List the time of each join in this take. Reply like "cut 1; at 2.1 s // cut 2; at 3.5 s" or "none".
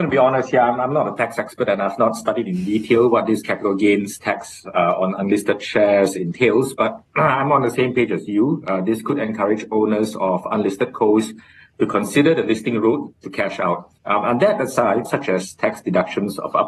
cut 1; at 14.0 s // cut 2; at 15.1 s